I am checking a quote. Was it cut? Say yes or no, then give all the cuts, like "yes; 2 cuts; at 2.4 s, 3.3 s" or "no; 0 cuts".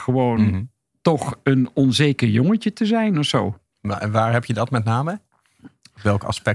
yes; 1 cut; at 3.7 s